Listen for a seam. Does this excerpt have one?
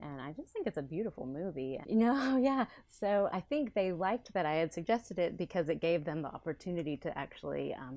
yes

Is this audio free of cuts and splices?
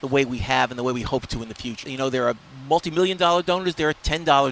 no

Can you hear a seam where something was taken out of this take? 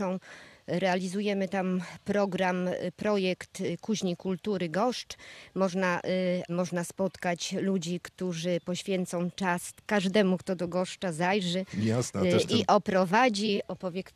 yes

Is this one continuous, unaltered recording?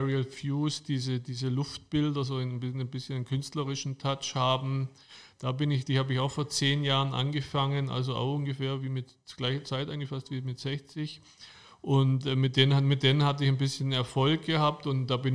yes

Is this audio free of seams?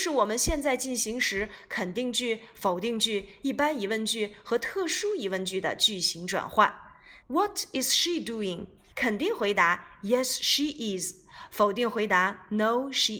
no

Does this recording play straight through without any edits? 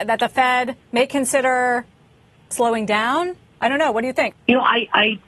no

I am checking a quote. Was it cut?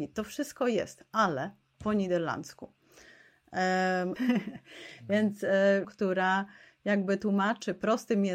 yes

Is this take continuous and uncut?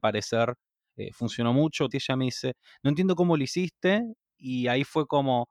no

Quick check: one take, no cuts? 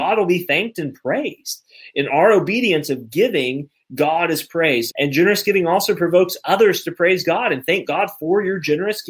no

